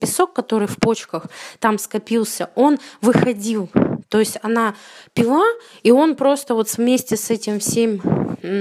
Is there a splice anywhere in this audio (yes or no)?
no